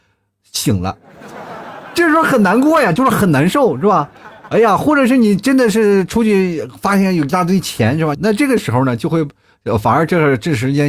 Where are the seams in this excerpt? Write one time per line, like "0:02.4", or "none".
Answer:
0:08.1